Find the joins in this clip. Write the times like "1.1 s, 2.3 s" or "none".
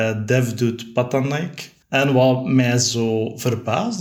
1.8 s